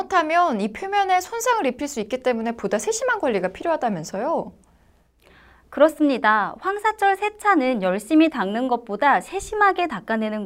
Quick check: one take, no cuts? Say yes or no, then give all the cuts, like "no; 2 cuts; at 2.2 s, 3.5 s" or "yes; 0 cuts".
yes; 0 cuts